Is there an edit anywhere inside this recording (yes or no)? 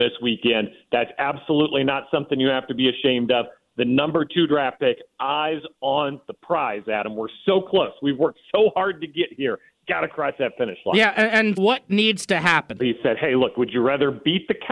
yes